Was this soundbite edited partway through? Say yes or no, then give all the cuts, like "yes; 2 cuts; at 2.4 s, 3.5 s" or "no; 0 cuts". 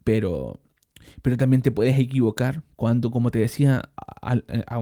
no; 0 cuts